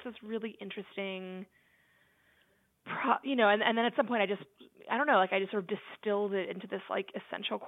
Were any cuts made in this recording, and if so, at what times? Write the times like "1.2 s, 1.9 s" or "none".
none